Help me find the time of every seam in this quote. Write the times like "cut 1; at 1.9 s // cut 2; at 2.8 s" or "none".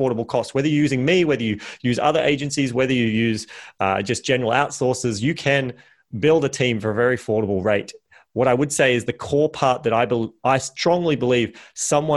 none